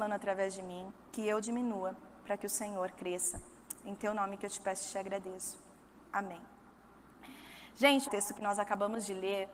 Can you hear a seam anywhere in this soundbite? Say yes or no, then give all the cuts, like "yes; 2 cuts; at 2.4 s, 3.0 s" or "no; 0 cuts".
yes; 1 cut; at 8.1 s